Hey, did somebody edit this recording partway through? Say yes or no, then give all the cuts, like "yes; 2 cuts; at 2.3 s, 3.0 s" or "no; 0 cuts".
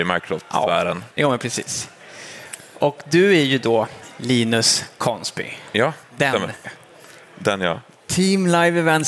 yes; 2 cuts; at 6.6 s, 7.9 s